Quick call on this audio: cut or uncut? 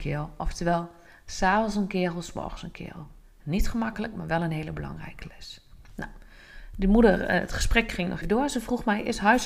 cut